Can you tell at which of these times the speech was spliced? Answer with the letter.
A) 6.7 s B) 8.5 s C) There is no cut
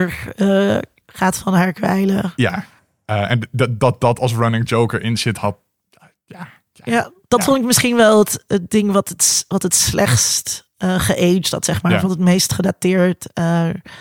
B